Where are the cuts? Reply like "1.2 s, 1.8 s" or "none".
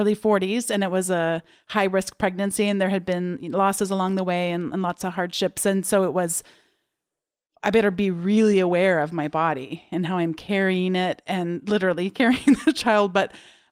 none